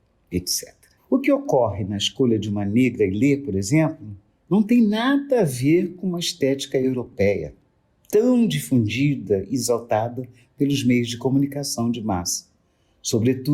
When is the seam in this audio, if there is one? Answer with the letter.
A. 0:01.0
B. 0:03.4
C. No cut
A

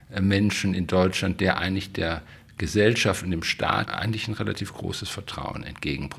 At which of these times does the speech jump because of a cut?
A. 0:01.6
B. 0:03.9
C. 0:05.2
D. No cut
B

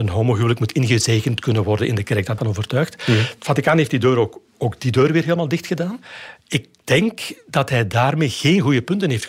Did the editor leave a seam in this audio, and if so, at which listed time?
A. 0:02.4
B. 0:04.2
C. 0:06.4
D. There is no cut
A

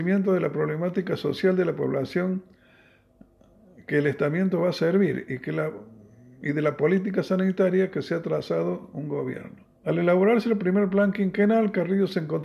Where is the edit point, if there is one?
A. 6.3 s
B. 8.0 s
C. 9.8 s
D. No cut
C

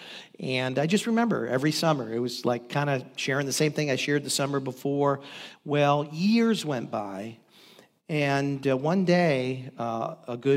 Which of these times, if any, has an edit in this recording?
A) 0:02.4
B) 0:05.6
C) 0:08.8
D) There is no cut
D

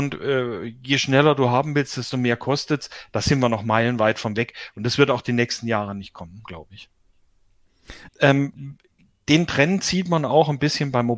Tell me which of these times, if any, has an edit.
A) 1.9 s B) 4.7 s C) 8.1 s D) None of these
C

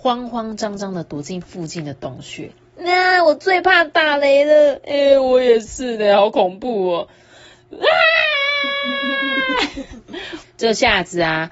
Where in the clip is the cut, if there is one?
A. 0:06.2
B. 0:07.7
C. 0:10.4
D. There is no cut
C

